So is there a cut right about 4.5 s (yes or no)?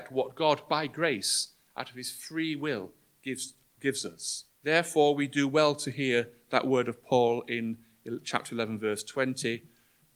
yes